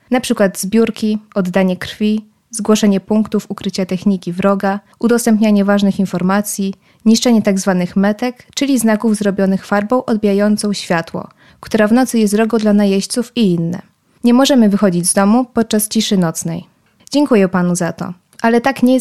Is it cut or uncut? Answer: cut